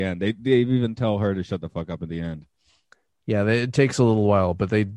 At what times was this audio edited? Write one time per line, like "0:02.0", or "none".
none